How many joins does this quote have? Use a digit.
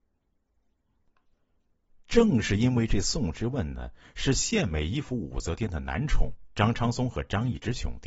0